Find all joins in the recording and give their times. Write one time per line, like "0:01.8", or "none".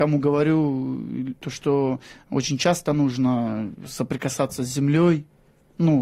none